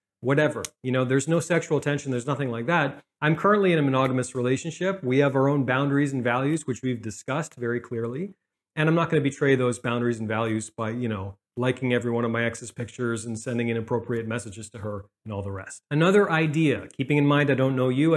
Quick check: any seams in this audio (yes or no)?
yes